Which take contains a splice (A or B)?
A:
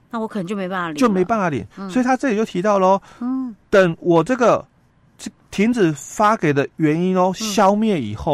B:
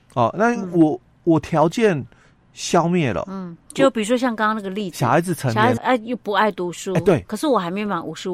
B